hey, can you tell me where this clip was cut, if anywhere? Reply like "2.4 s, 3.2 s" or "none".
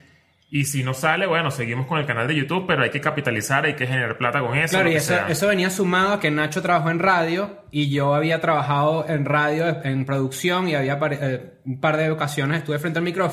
none